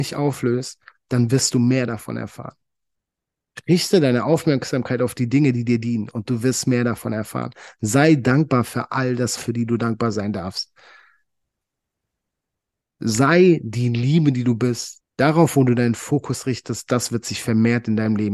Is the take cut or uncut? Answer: cut